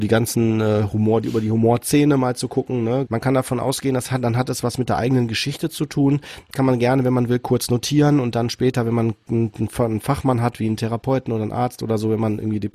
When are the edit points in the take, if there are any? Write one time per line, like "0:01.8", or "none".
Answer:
0:03.1